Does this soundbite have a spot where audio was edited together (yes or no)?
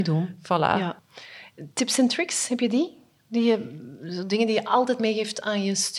no